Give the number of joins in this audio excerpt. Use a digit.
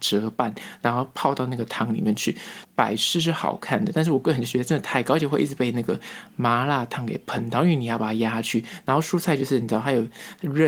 1